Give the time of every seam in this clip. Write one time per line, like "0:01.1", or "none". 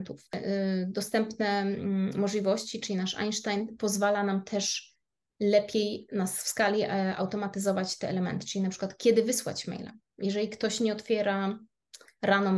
none